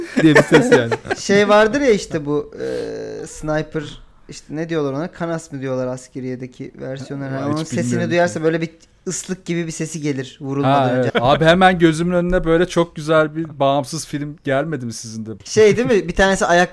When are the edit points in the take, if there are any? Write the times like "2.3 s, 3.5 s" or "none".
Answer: 11.1 s, 15.4 s